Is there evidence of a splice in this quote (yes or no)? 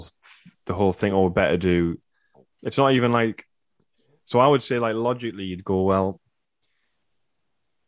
no